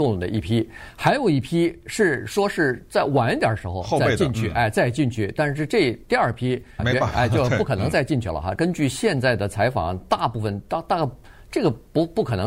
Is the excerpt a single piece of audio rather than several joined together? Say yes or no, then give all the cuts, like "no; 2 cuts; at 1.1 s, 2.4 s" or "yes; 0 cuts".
no; 2 cuts; at 6.8 s, 8.5 s